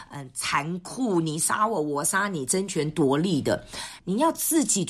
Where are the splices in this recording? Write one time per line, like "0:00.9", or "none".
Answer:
0:04.0